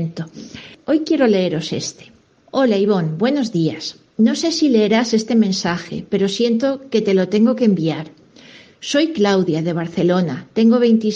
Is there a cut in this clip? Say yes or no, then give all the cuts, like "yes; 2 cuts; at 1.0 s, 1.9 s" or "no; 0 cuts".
no; 0 cuts